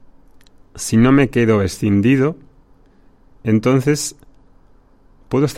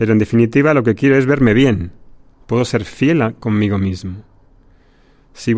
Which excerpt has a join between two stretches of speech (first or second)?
second